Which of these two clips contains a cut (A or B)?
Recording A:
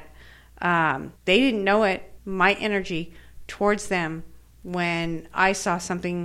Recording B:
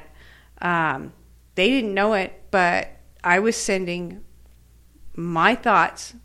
A